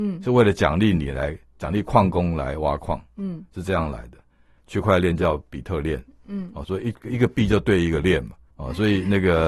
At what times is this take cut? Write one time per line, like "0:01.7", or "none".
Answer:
0:04.6
0:06.6
0:08.5